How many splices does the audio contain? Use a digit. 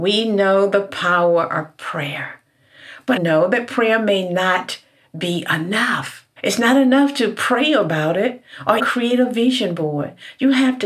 3